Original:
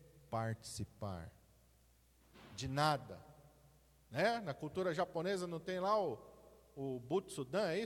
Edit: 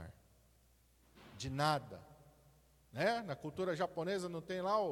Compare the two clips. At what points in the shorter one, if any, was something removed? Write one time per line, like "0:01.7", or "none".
none